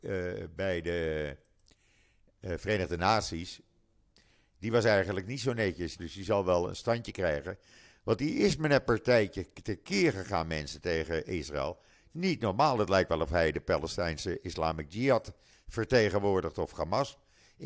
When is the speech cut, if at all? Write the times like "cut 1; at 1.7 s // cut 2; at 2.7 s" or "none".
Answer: cut 1; at 6.0 s